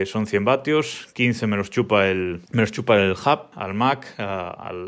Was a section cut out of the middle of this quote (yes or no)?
yes